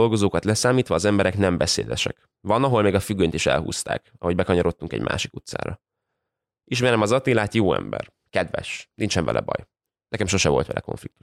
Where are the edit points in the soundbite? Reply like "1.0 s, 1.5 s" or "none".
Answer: none